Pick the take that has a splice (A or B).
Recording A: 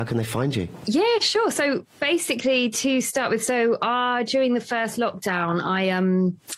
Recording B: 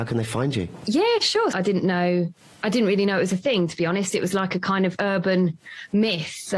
B